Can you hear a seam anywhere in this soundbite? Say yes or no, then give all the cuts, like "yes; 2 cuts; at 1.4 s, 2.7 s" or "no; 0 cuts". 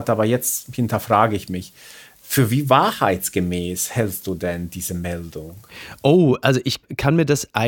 no; 0 cuts